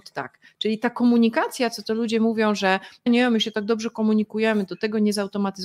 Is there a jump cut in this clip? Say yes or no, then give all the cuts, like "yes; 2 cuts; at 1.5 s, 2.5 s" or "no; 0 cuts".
yes; 1 cut; at 3.1 s